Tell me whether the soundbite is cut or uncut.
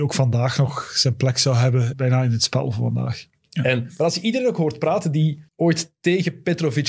cut